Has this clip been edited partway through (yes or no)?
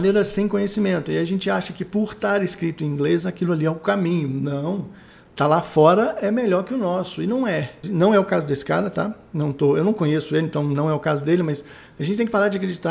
yes